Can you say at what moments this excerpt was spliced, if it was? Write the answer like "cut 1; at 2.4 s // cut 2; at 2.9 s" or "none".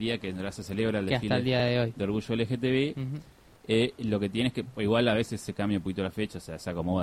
none